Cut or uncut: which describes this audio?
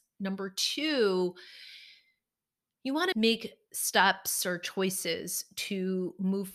cut